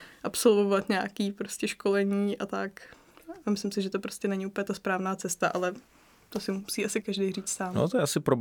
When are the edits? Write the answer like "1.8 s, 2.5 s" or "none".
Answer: 7.0 s